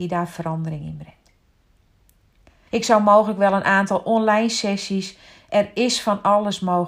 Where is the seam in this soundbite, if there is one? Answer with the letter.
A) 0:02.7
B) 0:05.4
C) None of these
A